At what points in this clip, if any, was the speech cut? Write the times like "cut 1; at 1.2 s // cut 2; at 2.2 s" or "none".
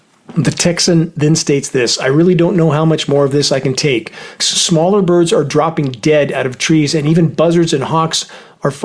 cut 1; at 4.4 s